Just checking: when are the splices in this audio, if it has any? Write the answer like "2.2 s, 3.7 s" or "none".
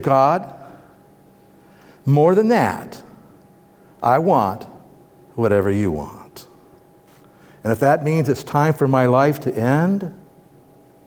none

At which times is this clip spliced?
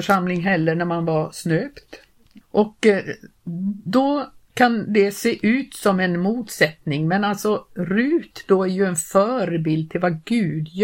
2.4 s

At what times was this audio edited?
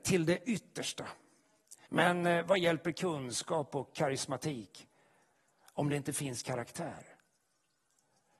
1.9 s

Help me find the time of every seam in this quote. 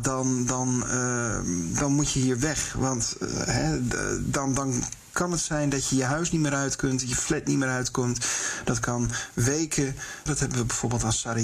10.3 s

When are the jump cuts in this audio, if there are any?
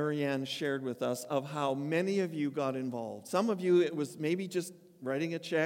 none

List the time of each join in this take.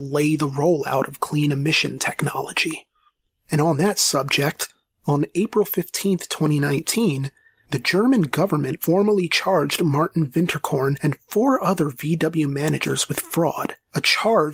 3.3 s

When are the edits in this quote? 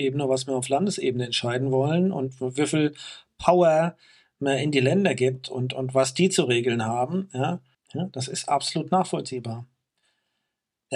7.7 s

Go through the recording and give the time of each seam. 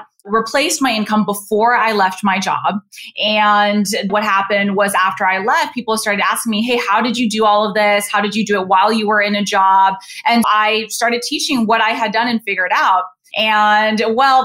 4.1 s, 10.4 s, 13.3 s

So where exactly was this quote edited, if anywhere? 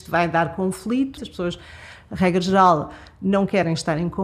1.2 s

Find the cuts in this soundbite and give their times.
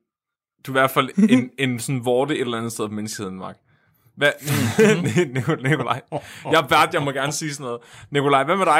1.1 s

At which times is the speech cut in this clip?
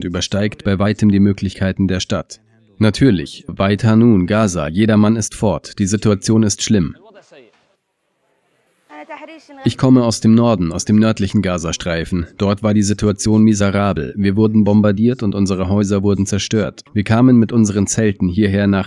3.5 s, 16.9 s

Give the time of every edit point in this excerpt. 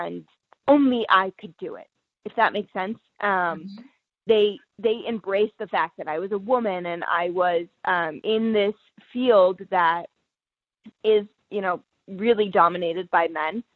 8.2 s

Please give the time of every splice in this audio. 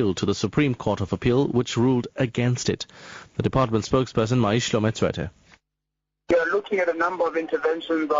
3.3 s

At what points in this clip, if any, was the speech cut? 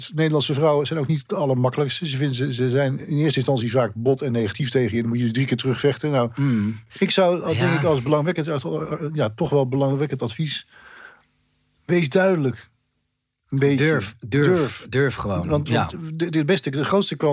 none

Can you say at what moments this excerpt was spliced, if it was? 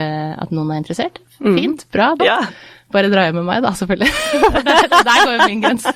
2.2 s

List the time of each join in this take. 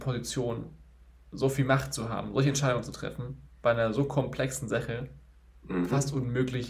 none

